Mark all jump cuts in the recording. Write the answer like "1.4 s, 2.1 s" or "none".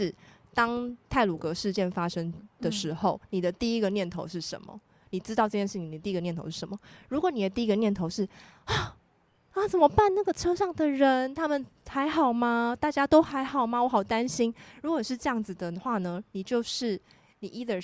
none